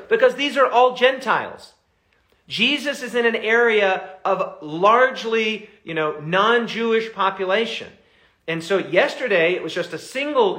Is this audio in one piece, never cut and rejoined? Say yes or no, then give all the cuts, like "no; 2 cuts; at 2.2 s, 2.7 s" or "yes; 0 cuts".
yes; 0 cuts